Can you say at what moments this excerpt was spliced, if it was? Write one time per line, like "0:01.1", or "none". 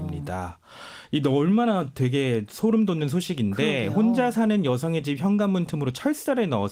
none